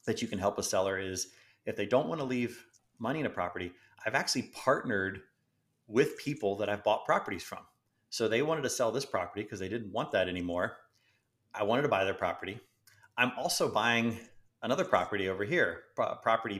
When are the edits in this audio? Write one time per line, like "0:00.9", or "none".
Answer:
none